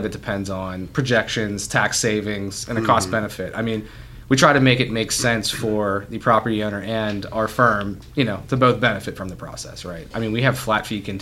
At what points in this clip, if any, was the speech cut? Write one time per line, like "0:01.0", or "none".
0:10.1